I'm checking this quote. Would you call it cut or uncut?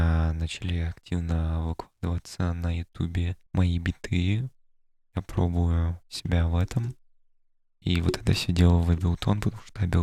cut